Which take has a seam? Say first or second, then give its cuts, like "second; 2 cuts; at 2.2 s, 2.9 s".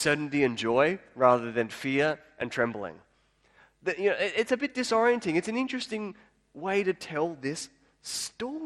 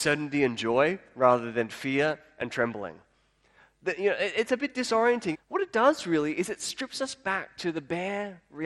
second; 1 cut; at 5.3 s